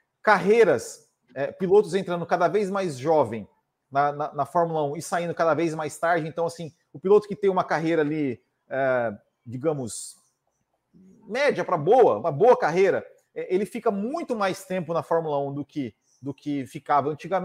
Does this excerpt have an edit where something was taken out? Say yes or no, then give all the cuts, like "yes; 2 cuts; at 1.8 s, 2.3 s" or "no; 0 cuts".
yes; 1 cut; at 12.2 s